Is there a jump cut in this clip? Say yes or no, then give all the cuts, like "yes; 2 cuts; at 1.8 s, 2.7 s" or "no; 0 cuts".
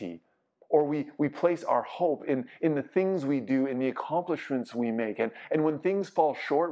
no; 0 cuts